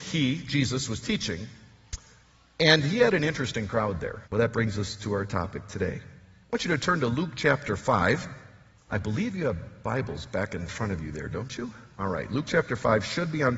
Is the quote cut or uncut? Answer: cut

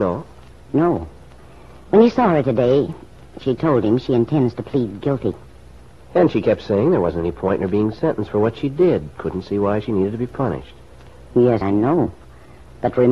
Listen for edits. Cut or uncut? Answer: cut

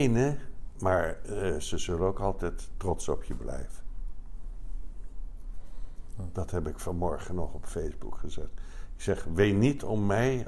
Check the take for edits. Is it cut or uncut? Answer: uncut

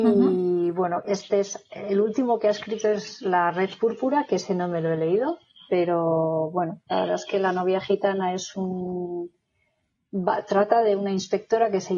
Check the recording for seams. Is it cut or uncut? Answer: uncut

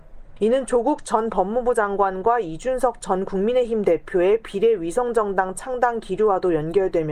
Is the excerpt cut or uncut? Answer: uncut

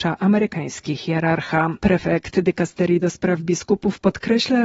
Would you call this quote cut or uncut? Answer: cut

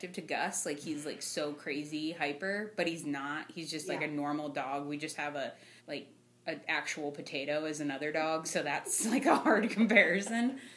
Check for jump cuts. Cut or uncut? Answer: cut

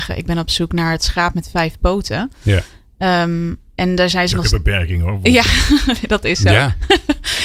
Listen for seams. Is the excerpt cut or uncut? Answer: uncut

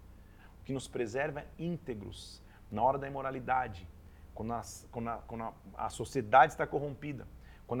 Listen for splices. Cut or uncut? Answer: uncut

